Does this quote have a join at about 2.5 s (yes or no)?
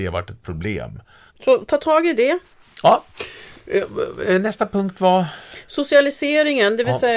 no